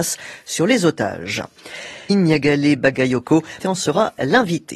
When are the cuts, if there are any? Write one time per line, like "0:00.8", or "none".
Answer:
0:02.1
0:03.6